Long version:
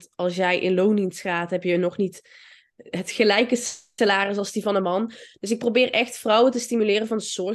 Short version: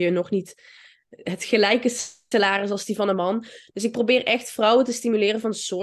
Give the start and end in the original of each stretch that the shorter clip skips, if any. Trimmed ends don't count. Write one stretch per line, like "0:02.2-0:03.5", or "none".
none